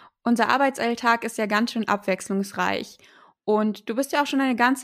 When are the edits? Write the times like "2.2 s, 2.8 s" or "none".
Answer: none

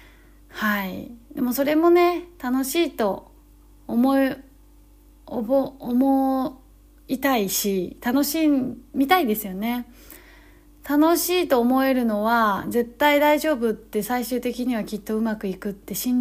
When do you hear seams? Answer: none

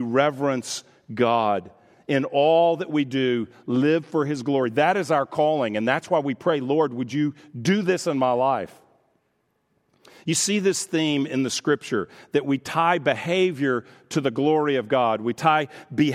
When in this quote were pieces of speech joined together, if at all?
none

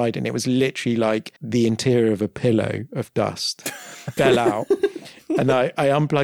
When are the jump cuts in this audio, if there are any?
1.4 s, 4.2 s

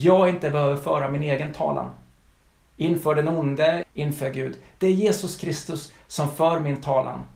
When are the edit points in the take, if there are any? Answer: 3.8 s

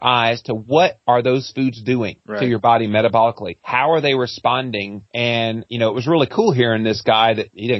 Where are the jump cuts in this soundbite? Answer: none

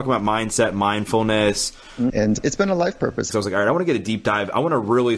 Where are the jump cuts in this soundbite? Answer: 2.1 s, 3.3 s

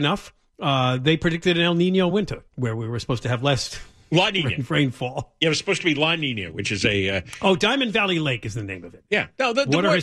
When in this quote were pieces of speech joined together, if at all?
2.5 s

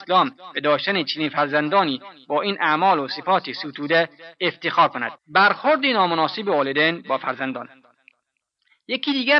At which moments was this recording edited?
5.2 s

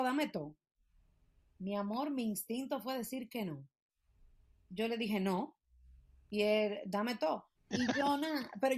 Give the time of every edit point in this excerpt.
7.6 s

